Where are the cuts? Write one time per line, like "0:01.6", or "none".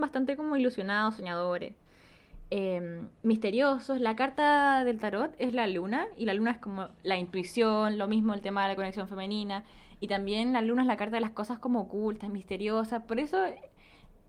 none